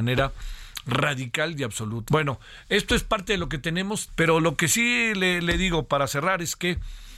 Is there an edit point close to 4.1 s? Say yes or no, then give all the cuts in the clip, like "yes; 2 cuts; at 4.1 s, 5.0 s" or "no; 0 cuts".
yes; 2 cuts; at 2.1 s, 4.1 s